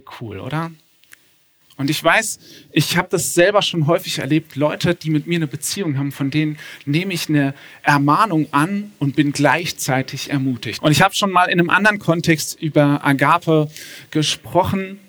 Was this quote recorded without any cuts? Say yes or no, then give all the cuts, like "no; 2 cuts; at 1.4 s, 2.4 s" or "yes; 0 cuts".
no; 2 cuts; at 1.6 s, 10.8 s